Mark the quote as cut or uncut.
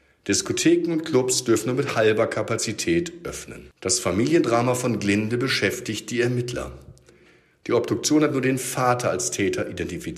cut